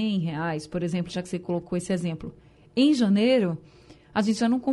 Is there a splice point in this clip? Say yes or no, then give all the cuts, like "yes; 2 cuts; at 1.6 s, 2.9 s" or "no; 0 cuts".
no; 0 cuts